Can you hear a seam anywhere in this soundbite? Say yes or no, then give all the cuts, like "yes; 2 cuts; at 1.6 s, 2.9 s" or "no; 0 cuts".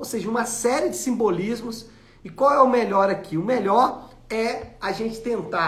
no; 0 cuts